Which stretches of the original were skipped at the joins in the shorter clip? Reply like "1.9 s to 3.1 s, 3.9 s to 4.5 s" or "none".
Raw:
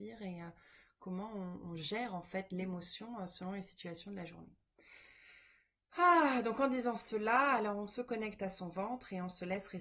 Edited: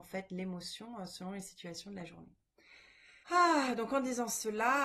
5.4 s to 5.9 s